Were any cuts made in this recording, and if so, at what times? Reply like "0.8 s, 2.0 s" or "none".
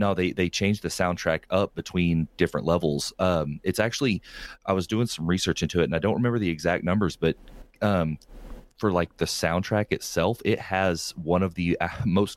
none